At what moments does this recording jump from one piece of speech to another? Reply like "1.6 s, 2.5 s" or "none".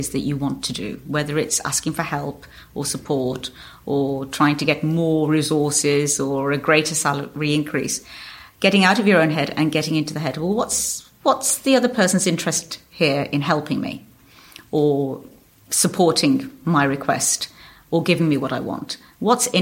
none